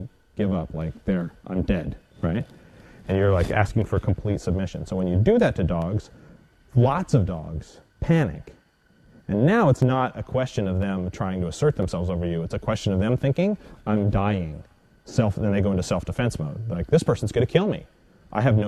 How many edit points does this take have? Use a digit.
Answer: 0